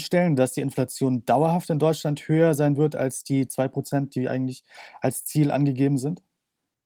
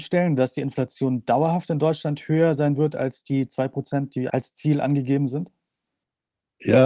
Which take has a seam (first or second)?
second